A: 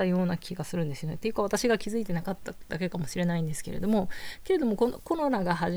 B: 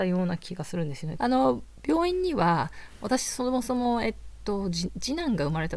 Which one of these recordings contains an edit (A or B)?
B